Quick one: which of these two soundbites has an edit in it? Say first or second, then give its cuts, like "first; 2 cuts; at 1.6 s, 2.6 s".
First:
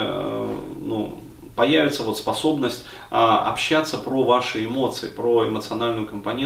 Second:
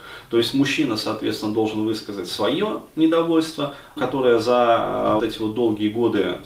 second; 2 cuts; at 4.0 s, 5.2 s